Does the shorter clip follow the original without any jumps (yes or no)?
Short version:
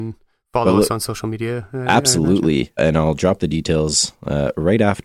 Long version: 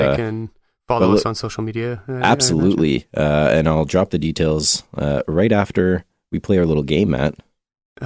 no